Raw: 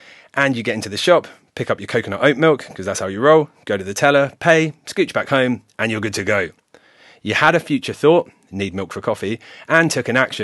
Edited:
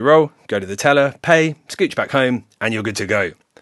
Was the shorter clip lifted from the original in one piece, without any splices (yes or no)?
yes